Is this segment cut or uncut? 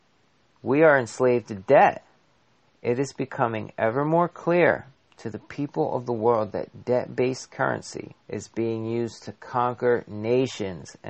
cut